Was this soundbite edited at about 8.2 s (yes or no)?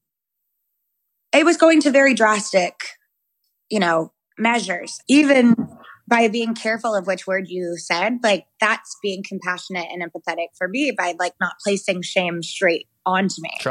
no